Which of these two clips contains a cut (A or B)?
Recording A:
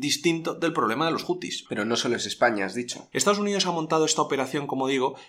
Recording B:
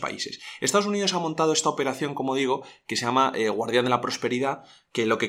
A